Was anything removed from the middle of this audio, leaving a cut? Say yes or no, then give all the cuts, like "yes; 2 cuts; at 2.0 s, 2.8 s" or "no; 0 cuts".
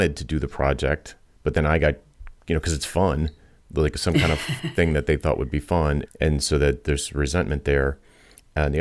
yes; 1 cut; at 6.1 s